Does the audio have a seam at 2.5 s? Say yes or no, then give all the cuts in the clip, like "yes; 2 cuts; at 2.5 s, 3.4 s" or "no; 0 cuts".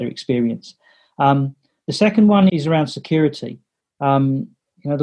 yes; 1 cut; at 2.5 s